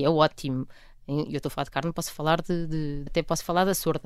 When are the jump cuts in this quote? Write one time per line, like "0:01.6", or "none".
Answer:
0:03.1